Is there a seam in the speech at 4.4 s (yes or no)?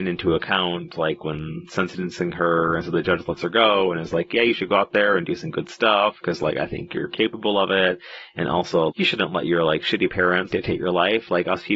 no